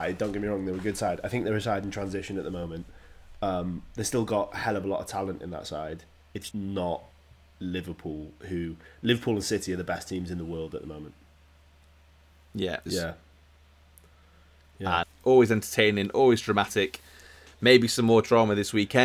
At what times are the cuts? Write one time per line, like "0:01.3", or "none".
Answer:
0:06.5
0:12.9
0:15.0